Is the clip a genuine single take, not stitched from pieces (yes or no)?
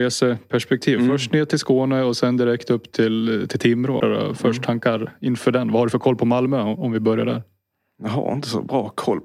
no